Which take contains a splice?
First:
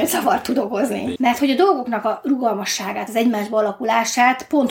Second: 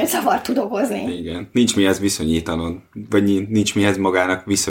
first; 2 cuts; at 1.2 s, 3.1 s

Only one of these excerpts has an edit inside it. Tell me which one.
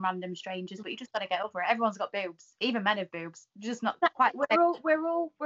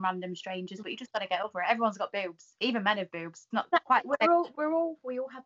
second; 2 cuts; at 3.5 s, 4.5 s

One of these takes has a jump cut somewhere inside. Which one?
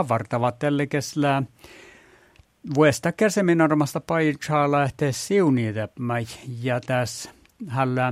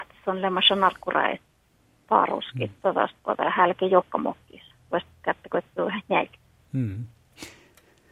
first; 1 cut; at 5.1 s

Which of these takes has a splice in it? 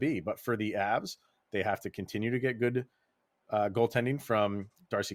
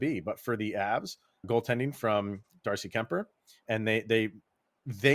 second; 2 cuts; at 1.4 s, 3.7 s

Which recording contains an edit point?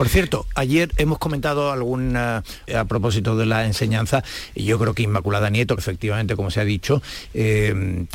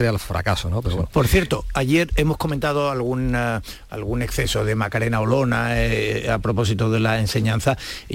first; 2 cuts; at 2.7 s, 5.8 s

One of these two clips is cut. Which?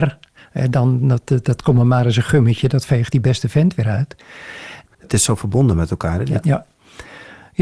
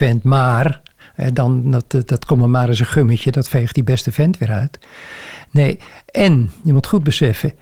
first; 2 cuts; at 4.9 s, 6.4 s

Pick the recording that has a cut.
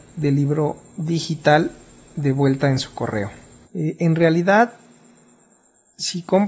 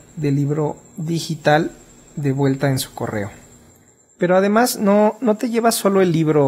first; 1 cut; at 3.6 s

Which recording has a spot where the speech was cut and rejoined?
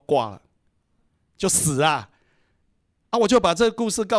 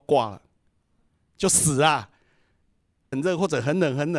second; 1 cut; at 3.1 s

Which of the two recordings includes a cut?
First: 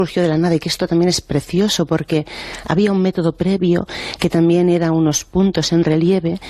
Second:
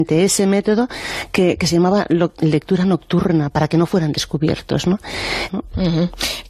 second; 1 cut; at 5.5 s

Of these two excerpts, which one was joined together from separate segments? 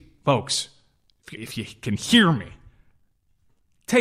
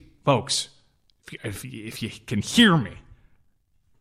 first; 1 cut; at 1.4 s

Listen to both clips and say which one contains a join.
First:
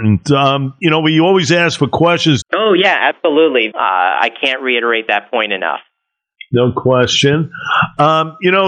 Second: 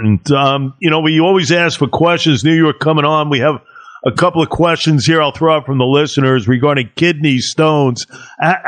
first; 2 cuts; at 2.4 s, 3.7 s

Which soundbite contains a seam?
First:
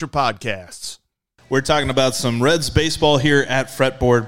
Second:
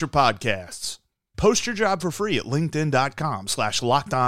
second; 1 cut; at 1.3 s

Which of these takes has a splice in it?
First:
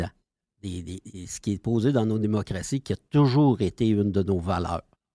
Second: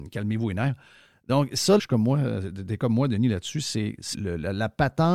second; 2 cuts; at 1.8 s, 4.1 s

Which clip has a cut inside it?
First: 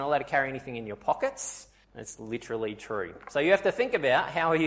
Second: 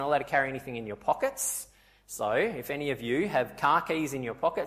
first; 1 cut; at 1.8 s

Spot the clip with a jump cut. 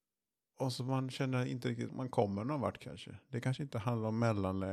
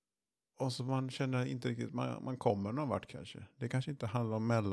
first; 1 cut; at 1.9 s

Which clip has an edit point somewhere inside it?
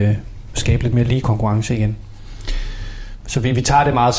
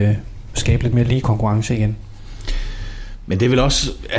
first; 1 cut; at 3.2 s

